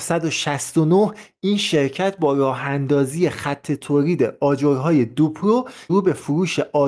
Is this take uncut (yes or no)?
no